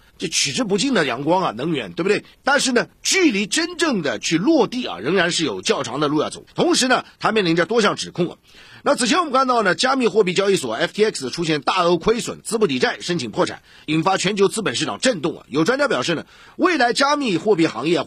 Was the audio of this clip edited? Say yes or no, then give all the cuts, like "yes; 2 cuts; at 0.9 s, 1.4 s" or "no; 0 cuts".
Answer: yes; 1 cut; at 6.5 s